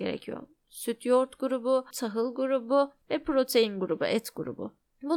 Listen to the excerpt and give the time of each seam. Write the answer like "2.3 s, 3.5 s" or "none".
1.9 s, 3.0 s